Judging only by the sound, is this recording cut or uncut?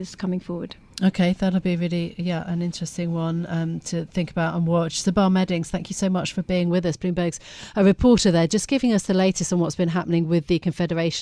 uncut